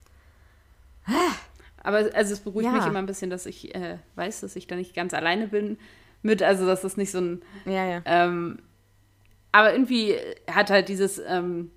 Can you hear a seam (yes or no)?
no